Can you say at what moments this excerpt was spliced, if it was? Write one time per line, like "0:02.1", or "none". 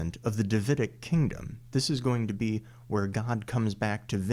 none